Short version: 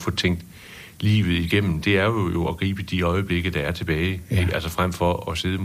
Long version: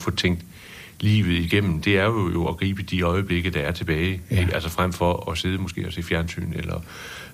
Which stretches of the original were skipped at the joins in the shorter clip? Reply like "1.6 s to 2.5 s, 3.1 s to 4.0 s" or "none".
none